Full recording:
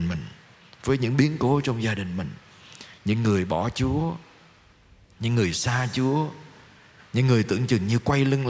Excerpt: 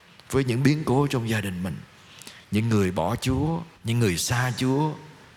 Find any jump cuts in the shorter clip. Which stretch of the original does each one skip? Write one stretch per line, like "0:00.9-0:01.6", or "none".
0:04.3-0:05.1